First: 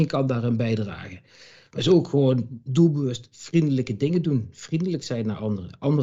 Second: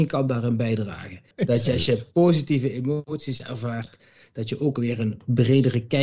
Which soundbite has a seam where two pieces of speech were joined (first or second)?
second